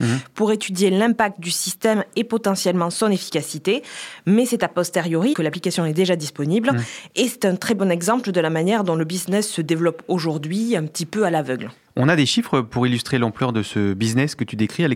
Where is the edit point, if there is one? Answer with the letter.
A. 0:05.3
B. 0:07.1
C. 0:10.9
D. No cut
A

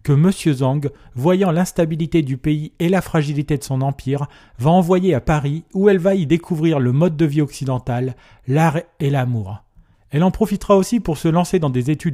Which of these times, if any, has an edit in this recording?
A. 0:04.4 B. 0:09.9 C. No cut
C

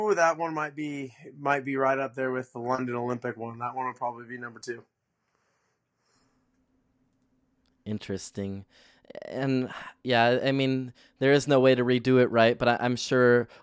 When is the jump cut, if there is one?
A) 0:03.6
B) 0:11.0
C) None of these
C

